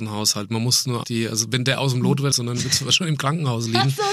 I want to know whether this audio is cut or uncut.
cut